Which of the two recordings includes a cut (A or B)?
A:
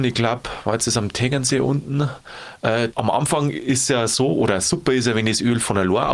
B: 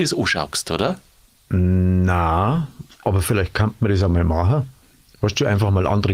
A